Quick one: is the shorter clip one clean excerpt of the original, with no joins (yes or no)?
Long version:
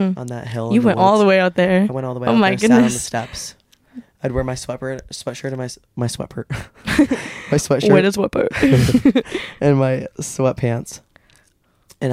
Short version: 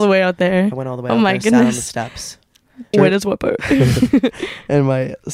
no